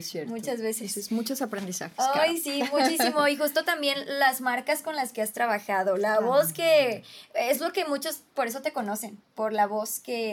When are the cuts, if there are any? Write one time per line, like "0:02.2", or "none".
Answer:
none